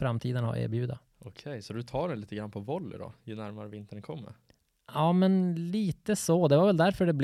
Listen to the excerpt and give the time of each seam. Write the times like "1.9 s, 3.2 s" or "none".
none